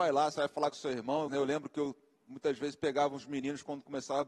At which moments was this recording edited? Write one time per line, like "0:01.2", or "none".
0:01.3